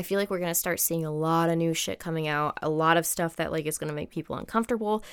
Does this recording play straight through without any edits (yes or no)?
yes